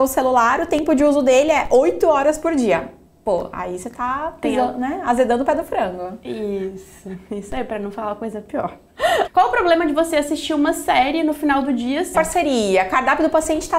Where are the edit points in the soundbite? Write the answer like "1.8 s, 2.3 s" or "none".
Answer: 9.3 s, 12.1 s